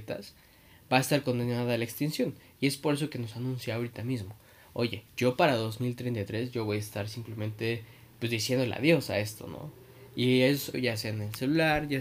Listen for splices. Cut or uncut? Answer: cut